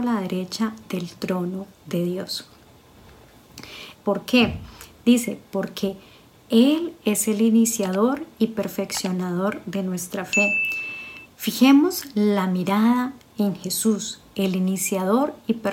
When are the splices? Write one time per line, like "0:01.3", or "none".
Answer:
0:03.9
0:11.2